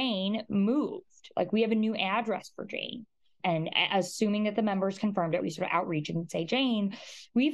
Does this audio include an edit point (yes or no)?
yes